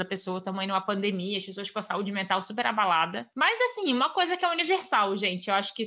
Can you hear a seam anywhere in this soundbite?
no; 0 cuts

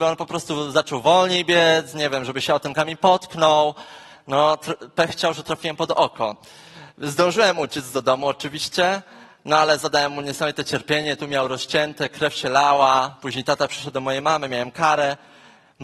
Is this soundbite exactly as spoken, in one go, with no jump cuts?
yes; 0 cuts

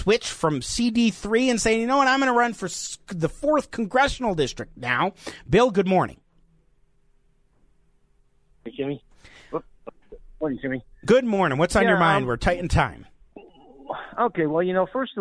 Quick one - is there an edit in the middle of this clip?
no; 0 cuts

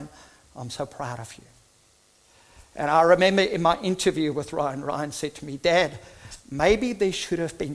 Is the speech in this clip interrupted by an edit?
no; 0 cuts

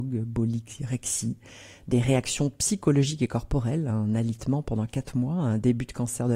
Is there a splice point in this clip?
no; 0 cuts

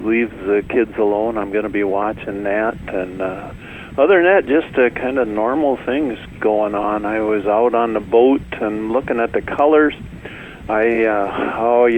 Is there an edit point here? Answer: no; 0 cuts

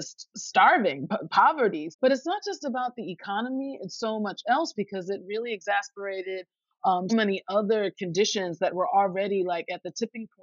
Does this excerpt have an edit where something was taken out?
yes; 2 cuts; at 1.9 s, 7.1 s

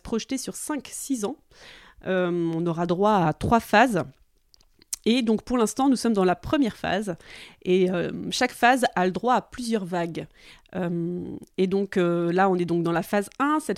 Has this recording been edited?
no; 0 cuts

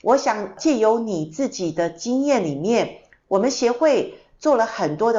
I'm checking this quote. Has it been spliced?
no; 0 cuts

